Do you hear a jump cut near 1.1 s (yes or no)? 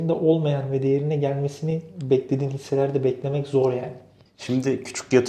no